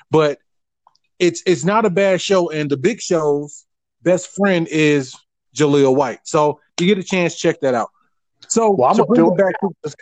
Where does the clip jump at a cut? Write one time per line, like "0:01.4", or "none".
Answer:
none